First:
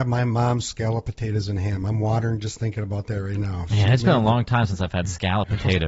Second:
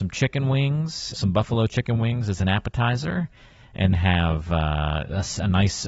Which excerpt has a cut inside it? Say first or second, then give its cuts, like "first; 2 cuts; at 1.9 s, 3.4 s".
second; 2 cuts; at 1.1 s, 3.9 s